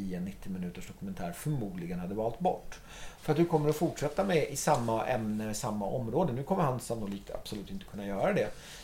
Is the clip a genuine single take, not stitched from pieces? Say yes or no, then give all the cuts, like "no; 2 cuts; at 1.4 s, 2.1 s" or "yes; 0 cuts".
no; 1 cut; at 3.2 s